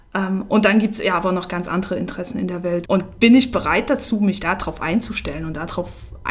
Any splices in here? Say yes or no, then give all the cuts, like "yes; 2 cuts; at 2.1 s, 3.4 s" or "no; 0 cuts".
yes; 1 cut; at 2.8 s